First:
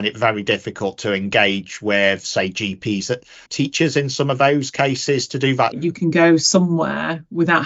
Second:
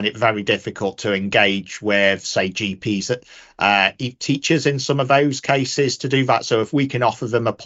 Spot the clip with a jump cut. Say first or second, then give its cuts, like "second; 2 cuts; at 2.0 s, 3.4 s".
first; 2 cuts; at 3.5 s, 5.7 s